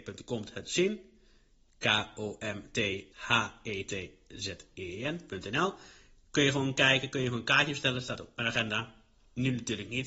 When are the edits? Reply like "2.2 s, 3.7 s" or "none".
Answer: none